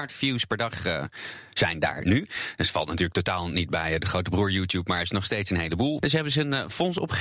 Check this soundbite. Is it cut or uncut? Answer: cut